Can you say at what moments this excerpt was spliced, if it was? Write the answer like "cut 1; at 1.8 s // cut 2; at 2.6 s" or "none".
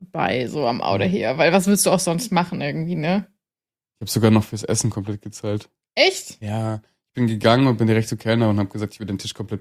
none